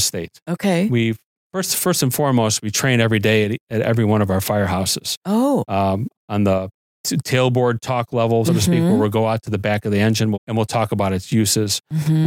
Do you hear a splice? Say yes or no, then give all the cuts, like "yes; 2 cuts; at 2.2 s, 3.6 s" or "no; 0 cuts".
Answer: yes; 3 cuts; at 6.1 s, 8.4 s, 10.3 s